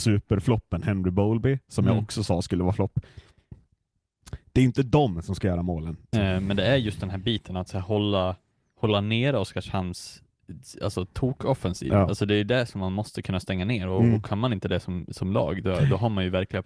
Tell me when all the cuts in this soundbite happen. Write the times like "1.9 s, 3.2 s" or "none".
6.1 s